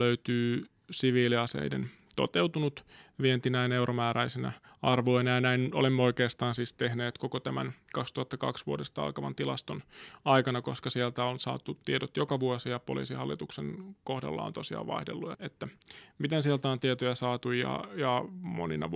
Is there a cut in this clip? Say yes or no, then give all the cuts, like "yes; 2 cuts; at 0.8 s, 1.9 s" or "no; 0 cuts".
yes; 1 cut; at 15.3 s